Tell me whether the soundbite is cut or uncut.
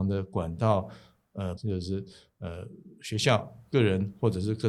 cut